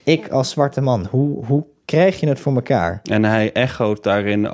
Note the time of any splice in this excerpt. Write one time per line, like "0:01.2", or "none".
none